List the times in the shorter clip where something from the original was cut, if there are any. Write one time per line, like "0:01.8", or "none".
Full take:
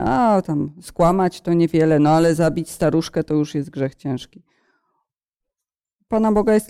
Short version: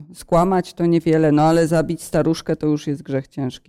none